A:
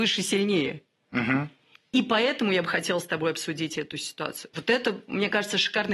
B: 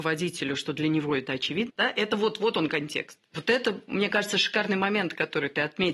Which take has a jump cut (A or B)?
B